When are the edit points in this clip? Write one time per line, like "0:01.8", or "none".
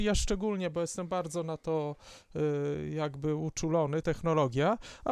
0:04.0